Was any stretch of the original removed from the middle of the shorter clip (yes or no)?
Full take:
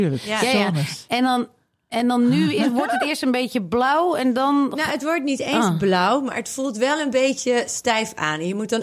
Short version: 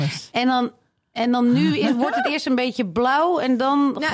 no